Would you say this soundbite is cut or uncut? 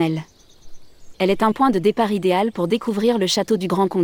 cut